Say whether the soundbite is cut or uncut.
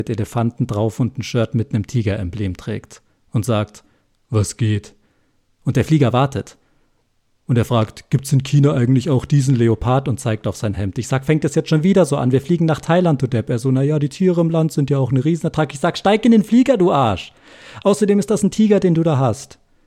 uncut